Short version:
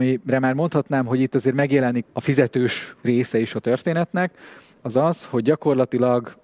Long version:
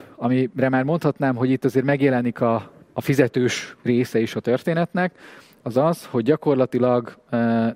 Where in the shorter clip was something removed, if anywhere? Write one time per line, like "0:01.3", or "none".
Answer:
0:02.0